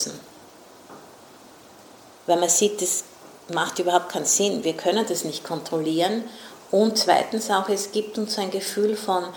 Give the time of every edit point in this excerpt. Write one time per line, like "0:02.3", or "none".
0:02.1